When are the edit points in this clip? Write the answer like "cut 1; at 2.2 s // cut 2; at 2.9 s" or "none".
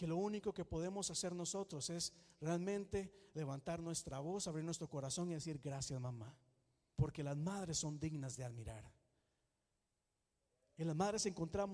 cut 1; at 6.9 s